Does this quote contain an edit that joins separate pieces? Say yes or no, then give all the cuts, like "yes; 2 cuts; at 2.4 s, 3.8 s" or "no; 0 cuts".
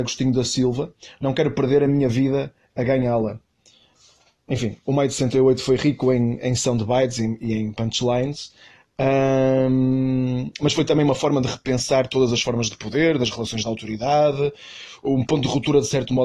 no; 0 cuts